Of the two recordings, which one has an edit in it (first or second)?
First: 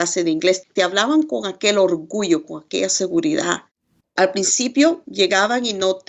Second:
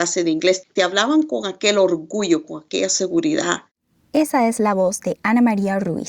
first